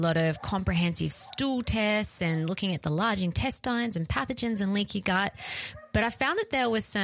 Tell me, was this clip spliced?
no; 0 cuts

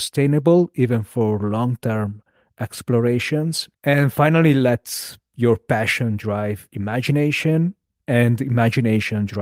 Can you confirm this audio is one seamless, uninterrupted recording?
no; 1 cut; at 3.7 s

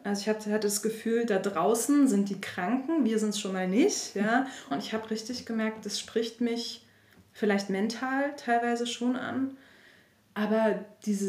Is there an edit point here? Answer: yes; 1 cut; at 4.7 s

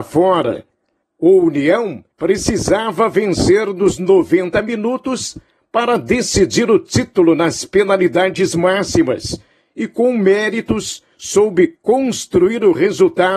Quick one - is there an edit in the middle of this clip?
yes; 2 cuts; at 1.0 s, 2.1 s

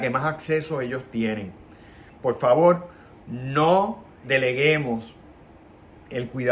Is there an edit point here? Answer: yes; 1 cut; at 4.2 s

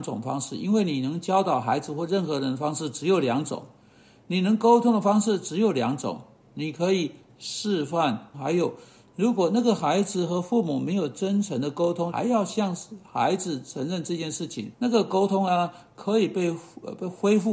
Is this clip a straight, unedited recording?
no; 3 cuts; at 8.3 s, 12.1 s, 14.7 s

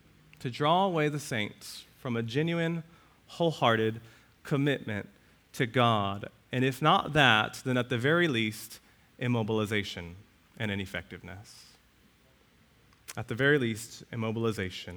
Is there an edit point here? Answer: no; 0 cuts

